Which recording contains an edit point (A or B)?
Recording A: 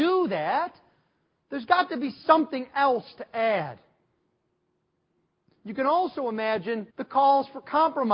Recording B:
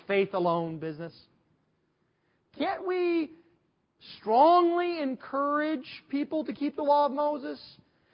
A